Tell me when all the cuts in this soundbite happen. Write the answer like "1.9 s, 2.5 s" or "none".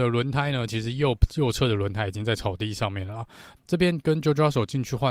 3.6 s